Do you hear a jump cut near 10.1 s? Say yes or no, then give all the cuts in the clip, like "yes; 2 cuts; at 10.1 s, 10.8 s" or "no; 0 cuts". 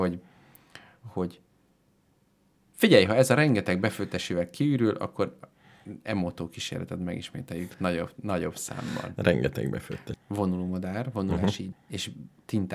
yes; 2 cuts; at 10.1 s, 11.7 s